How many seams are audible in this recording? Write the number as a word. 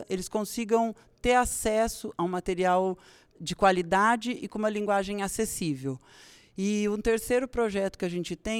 zero